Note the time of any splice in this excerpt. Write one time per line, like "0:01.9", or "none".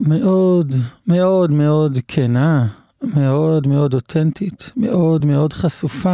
0:03.6
0:05.2